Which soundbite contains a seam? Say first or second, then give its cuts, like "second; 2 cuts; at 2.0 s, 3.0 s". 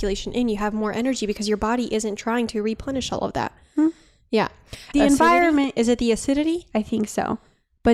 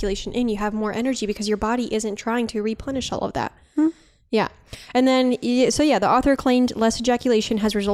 first; 1 cut; at 4.9 s